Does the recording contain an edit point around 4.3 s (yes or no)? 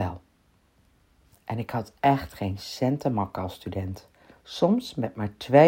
yes